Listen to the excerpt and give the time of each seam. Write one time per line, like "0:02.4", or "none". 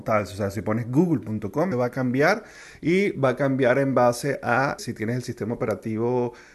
0:01.7
0:04.8